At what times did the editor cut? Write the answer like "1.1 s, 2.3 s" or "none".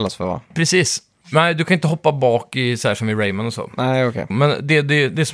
1.2 s, 4.3 s